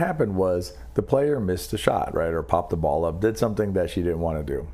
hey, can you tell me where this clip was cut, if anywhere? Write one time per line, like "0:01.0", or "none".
none